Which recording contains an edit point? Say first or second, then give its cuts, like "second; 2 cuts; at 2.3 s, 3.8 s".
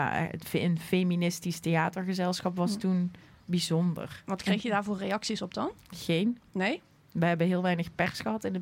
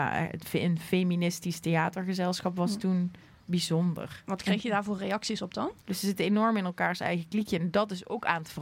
second; 1 cut; at 5.8 s